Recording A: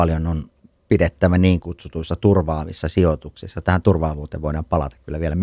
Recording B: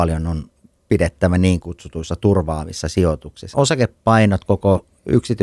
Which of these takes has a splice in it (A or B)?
B